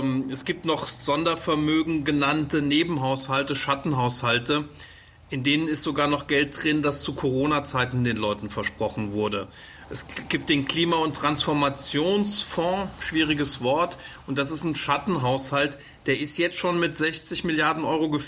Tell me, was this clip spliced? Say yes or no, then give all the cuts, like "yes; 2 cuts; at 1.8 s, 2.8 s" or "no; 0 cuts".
no; 0 cuts